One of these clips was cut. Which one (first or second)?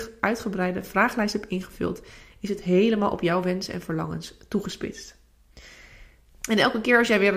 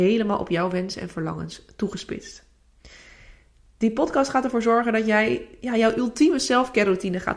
first